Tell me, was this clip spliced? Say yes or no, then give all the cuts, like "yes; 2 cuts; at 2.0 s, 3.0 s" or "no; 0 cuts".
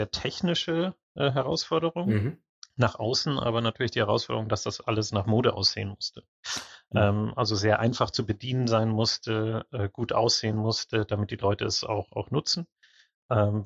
no; 0 cuts